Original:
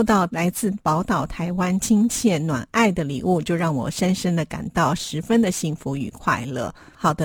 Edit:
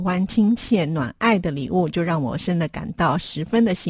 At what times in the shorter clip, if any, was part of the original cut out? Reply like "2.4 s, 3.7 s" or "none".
2.4 s